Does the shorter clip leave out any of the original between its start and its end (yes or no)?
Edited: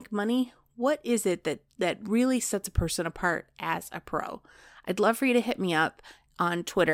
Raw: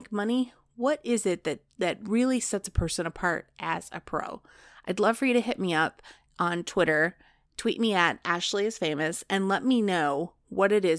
no